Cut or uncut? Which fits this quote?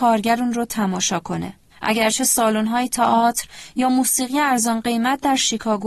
cut